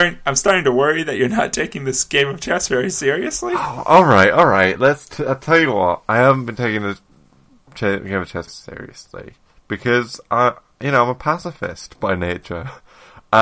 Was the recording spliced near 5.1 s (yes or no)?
no